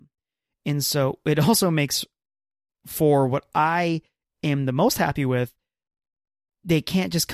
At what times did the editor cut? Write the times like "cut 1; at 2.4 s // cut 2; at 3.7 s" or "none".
none